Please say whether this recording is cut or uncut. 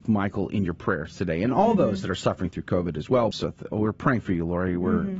cut